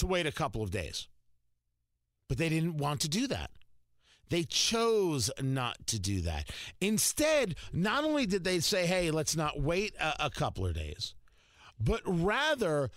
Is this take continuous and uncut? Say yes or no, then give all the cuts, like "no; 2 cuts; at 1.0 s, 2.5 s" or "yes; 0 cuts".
yes; 0 cuts